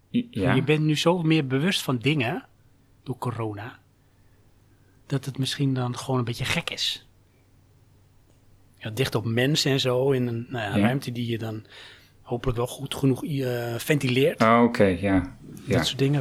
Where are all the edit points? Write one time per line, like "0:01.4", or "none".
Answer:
none